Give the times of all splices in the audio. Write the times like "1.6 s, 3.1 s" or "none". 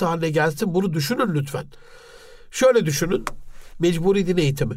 3.7 s